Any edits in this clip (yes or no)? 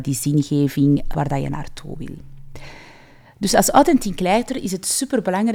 yes